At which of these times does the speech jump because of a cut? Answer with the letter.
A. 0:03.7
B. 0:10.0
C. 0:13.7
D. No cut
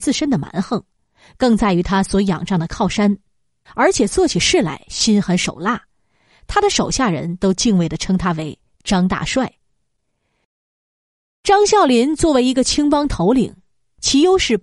A